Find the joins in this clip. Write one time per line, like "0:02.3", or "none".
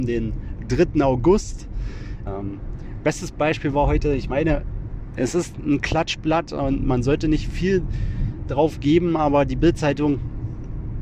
0:02.2

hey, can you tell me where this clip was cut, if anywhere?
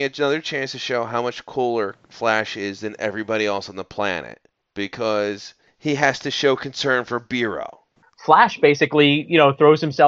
0:08.0

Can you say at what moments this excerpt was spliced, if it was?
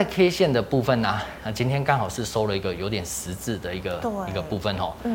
none

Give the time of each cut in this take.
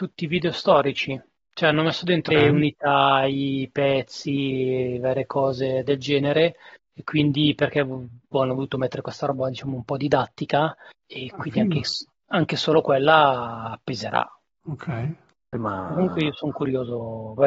0:02.3

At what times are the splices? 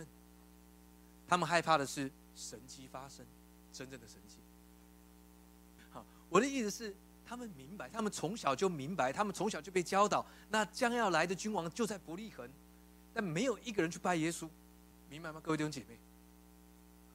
0:05.8
0:14.9

